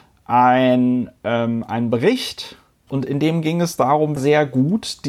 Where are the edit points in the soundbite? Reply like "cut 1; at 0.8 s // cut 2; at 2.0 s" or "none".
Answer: cut 1; at 2.9 s // cut 2; at 4.2 s